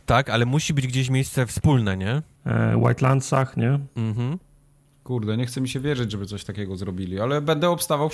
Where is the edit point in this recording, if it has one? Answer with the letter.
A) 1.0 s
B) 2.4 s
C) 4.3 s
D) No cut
B